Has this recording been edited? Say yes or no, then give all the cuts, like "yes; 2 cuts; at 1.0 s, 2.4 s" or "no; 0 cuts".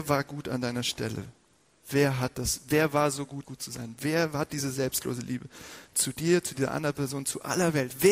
yes; 1 cut; at 3.4 s